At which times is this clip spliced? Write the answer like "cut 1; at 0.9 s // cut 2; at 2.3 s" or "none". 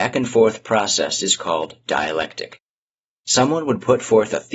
none